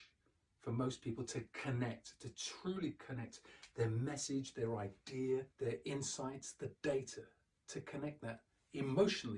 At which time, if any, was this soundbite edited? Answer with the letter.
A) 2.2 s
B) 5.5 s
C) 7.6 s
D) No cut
B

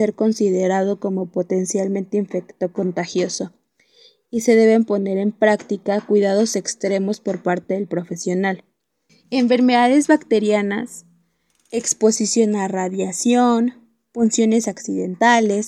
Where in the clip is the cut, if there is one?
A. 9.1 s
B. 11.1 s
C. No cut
A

